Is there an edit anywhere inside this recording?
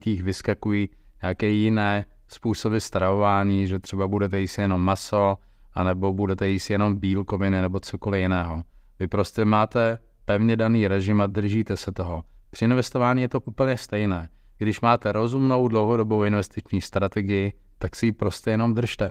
no; 0 cuts

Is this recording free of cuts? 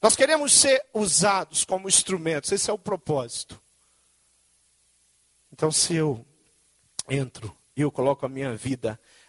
yes; 0 cuts

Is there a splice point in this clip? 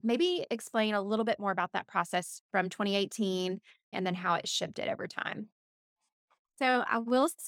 yes; 1 cut; at 3.9 s

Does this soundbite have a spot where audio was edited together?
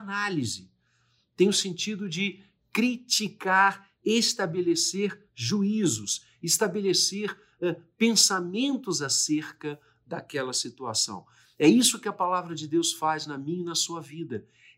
no; 0 cuts

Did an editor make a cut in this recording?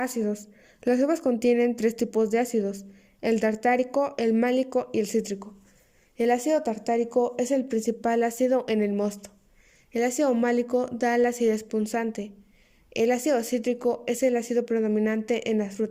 no; 0 cuts

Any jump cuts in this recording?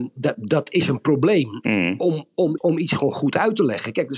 yes; 1 cut; at 2.6 s

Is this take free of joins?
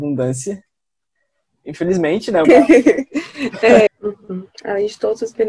no; 2 cuts; at 2.4 s, 3.9 s

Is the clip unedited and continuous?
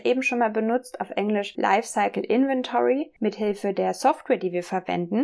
no; 1 cut; at 3.2 s

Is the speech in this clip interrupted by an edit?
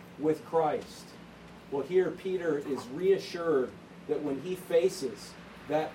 yes; 1 cut; at 1.7 s

